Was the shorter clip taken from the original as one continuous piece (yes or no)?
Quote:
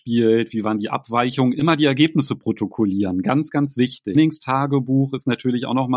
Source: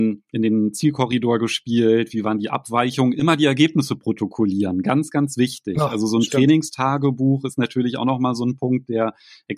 no